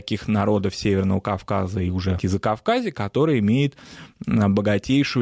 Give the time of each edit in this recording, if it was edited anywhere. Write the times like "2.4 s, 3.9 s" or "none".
2.2 s

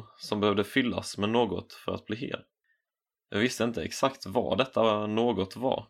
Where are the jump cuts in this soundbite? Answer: none

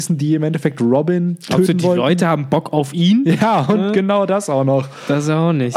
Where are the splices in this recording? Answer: none

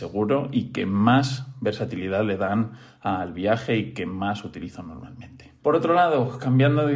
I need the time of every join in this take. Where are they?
5.6 s

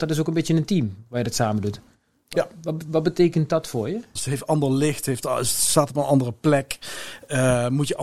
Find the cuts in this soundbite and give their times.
4.2 s

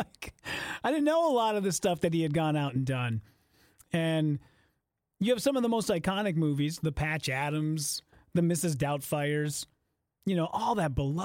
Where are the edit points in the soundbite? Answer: none

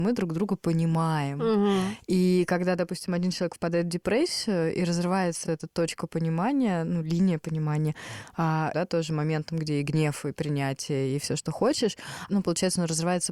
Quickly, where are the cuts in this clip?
5.4 s, 8.7 s, 12.3 s

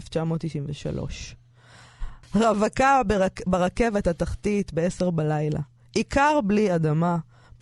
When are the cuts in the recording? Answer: 2.2 s

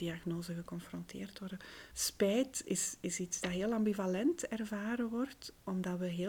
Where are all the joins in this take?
1.9 s

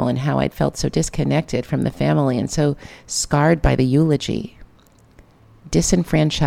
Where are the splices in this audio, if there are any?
none

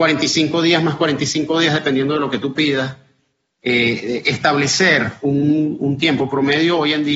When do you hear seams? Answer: none

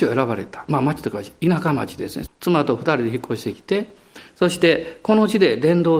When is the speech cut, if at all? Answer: 2.3 s

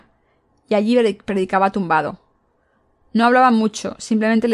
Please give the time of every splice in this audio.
none

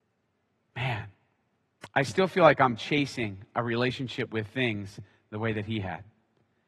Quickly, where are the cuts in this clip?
none

